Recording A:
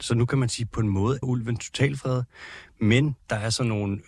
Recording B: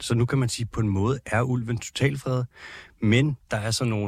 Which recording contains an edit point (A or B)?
A